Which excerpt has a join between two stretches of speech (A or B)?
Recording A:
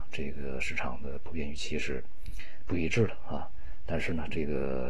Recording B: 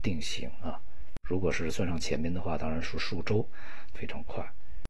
B